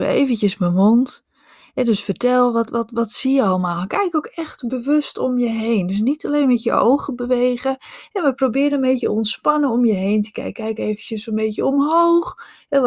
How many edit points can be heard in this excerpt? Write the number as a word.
zero